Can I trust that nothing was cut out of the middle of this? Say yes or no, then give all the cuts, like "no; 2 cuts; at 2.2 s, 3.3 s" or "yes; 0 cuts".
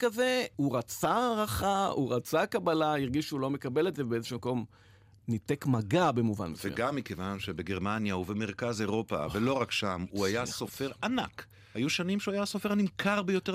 yes; 0 cuts